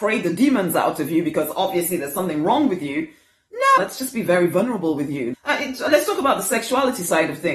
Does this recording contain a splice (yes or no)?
yes